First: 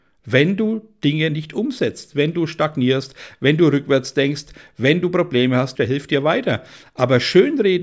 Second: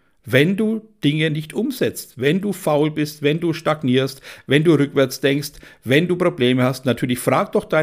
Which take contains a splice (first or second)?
first